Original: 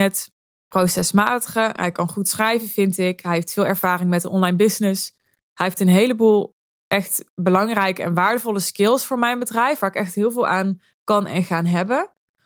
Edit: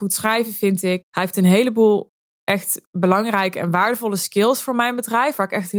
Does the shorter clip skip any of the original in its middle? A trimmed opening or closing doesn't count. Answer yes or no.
yes